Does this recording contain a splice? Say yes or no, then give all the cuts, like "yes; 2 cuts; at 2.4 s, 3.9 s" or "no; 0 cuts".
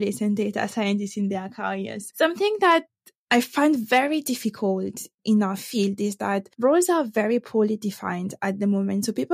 no; 0 cuts